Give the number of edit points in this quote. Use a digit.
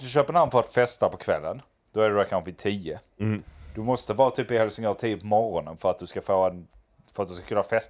0